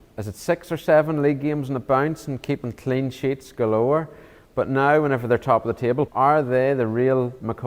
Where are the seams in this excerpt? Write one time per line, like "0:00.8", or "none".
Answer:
0:06.1